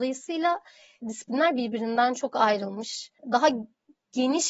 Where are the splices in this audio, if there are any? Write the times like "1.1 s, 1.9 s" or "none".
1.0 s